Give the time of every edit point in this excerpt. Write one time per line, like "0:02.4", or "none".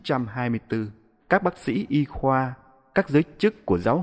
0:01.2